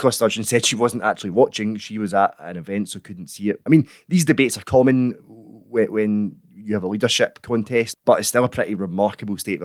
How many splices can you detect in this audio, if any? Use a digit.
2